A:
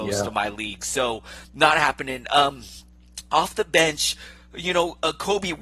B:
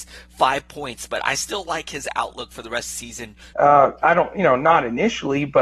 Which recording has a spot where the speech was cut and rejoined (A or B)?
B